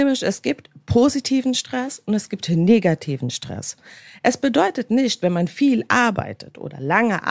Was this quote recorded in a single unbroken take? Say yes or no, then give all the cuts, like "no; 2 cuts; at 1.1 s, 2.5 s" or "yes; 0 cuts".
yes; 0 cuts